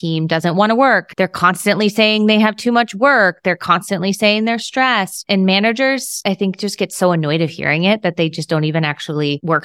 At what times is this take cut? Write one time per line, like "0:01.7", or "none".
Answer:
none